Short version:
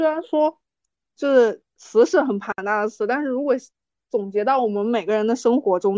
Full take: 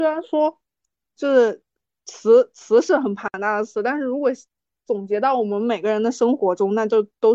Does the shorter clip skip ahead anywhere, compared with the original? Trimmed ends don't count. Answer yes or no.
yes